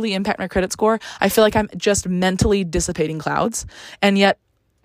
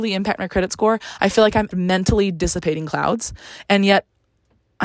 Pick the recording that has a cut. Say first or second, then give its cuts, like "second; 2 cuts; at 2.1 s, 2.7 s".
second; 1 cut; at 1.7 s